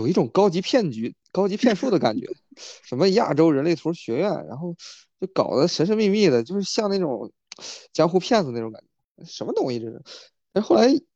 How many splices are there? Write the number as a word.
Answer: zero